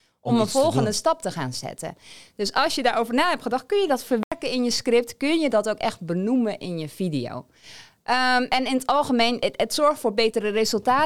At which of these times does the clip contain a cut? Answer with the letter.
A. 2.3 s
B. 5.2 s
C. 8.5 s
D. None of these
D